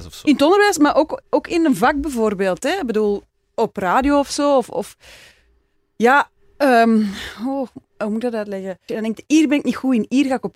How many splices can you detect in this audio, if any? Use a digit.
1